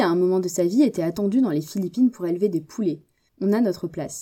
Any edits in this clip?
yes; 1 cut; at 3.3 s

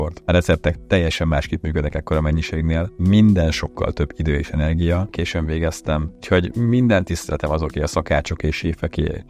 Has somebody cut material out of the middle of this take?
yes; 1 cut; at 5.1 s

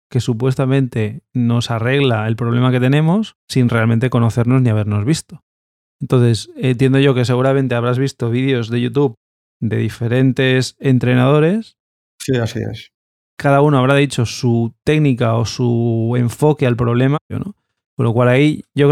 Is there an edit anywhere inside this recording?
yes; 2 cuts; at 3.4 s, 17.3 s

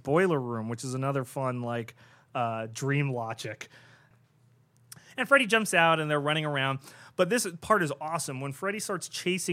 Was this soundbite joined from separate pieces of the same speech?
yes; 1 cut; at 4.1 s

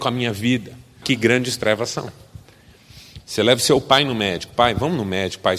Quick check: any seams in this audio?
yes; 2 cuts; at 1.0 s, 3.2 s

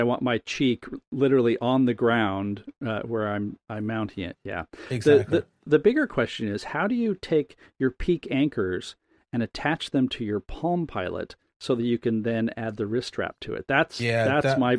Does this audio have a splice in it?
no; 0 cuts

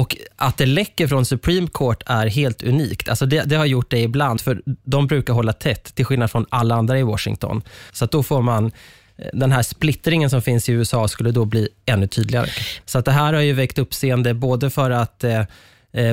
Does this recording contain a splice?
yes; 3 cuts; at 4.4 s, 7.9 s, 12.8 s

